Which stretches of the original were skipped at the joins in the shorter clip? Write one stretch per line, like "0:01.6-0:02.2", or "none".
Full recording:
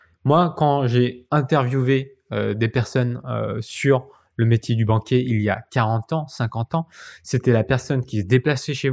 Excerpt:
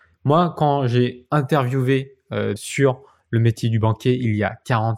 0:02.6-0:03.6